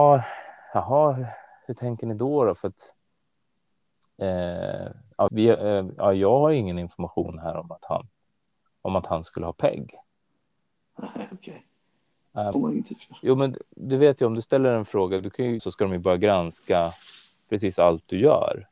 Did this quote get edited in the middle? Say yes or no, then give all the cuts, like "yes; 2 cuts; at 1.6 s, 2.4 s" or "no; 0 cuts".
yes; 3 cuts; at 5.3 s, 12.5 s, 15.6 s